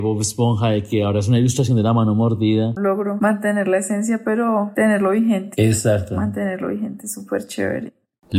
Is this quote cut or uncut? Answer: cut